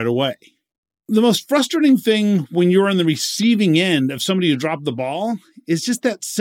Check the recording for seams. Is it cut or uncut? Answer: uncut